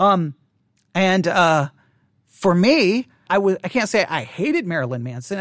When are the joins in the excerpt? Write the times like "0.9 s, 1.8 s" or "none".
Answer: 3.3 s